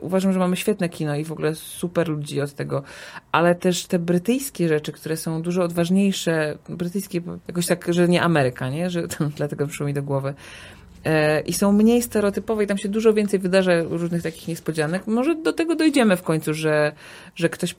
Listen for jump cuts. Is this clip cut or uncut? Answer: cut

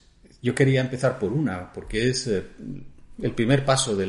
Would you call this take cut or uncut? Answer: uncut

